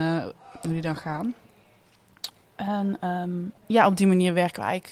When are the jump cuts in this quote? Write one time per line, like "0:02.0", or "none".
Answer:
0:03.6